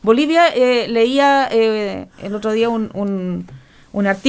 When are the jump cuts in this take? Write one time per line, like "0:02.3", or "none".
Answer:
none